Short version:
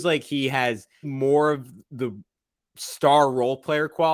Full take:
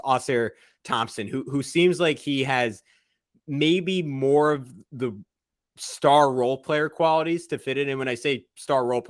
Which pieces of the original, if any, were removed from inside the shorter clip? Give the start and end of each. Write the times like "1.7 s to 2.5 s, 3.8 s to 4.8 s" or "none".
3.0 s to 4.0 s